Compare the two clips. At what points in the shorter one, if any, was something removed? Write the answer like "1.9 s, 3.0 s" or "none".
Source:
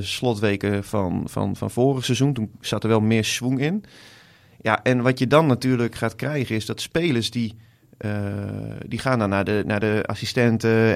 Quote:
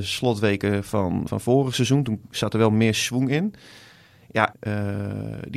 1.3 s, 4.5 s